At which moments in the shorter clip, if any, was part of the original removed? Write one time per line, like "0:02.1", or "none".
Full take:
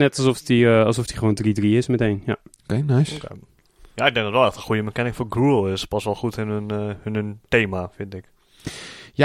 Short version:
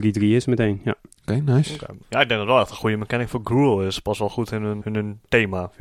0:02.0
0:04.8